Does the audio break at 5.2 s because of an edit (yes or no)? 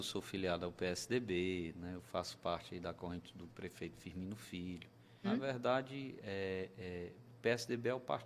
yes